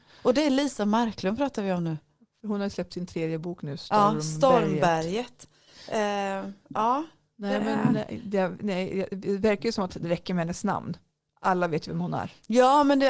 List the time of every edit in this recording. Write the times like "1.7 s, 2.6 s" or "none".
none